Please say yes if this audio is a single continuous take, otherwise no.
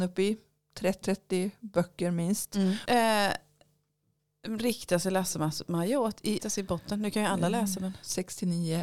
no